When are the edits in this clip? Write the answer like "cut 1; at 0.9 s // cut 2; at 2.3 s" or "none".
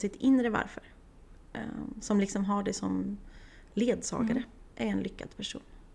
cut 1; at 4.7 s